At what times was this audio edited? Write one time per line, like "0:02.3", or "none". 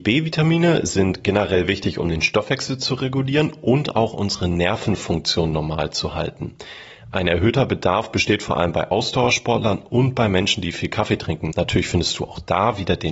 0:11.5